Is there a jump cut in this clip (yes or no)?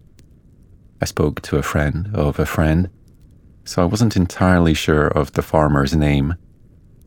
no